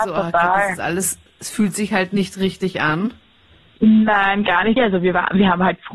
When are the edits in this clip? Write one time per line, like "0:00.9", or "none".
0:04.8